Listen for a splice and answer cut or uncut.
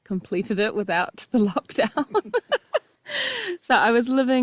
uncut